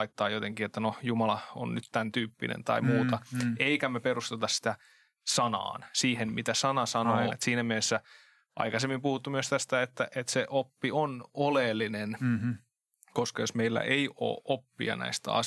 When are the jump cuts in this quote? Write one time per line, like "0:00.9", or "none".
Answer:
0:07.3